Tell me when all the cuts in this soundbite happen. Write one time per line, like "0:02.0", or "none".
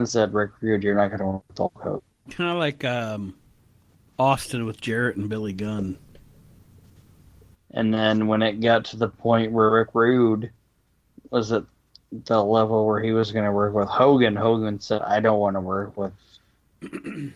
0:07.5